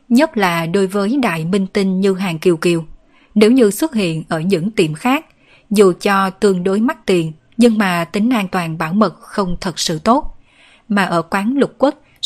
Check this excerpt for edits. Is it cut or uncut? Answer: uncut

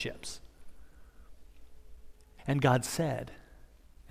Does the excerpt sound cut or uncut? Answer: cut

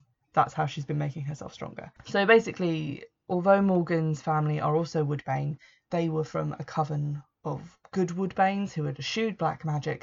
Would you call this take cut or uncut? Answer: uncut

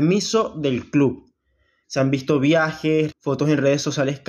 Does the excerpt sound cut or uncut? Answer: cut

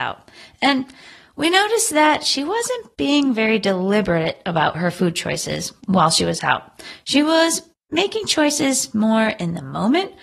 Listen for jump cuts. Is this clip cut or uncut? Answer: uncut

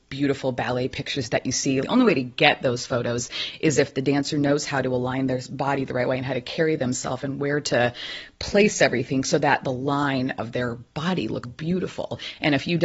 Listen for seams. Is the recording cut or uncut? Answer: cut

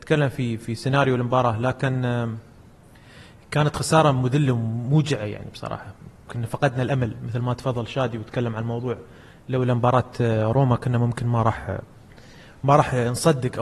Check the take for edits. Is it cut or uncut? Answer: uncut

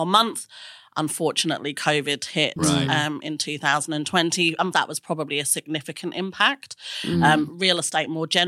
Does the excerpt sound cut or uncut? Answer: cut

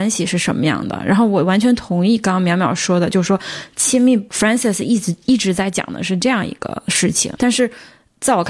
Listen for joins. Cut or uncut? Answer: cut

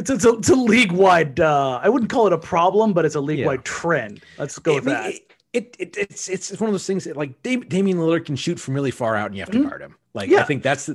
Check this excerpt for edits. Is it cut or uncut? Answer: uncut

